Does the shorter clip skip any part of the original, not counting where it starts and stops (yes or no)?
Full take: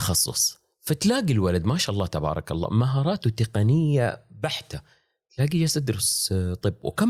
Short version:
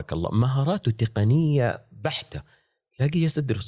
no